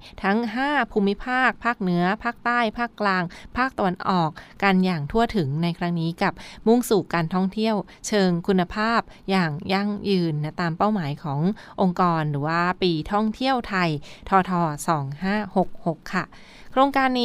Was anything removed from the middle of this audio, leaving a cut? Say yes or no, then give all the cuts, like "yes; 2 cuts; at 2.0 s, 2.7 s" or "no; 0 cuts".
yes; 1 cut; at 14.4 s